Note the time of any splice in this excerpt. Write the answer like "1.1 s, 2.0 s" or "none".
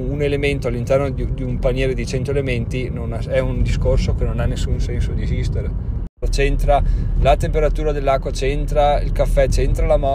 6.2 s